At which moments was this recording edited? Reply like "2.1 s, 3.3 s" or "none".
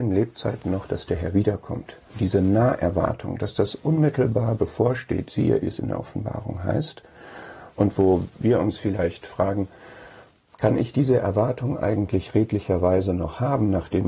5.6 s